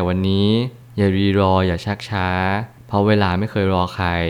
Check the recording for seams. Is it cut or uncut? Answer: uncut